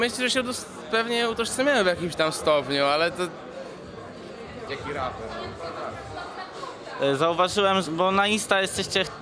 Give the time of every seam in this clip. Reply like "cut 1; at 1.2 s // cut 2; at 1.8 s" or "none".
cut 1; at 4.7 s // cut 2; at 7.8 s